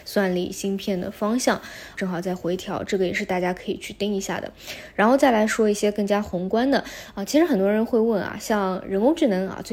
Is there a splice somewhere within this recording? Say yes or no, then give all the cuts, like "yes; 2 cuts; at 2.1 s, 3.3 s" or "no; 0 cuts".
yes; 1 cut; at 2.0 s